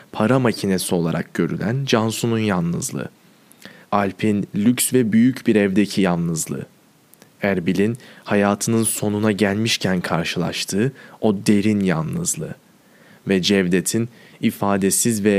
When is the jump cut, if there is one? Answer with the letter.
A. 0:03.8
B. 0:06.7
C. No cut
A